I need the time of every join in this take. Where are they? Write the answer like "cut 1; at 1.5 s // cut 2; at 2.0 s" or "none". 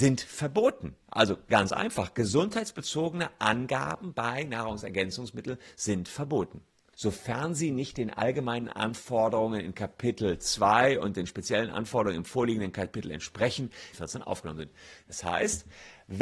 cut 1; at 1.0 s // cut 2; at 6.9 s // cut 3; at 13.9 s